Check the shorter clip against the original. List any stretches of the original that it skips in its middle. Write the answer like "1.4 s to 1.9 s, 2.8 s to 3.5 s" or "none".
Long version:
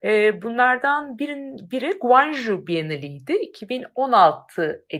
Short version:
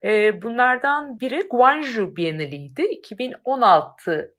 1.2 s to 1.7 s